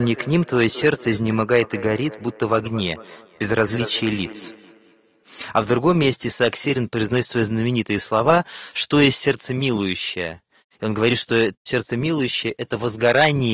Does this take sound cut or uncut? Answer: uncut